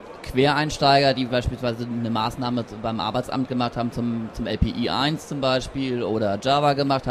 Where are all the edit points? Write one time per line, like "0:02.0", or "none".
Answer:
none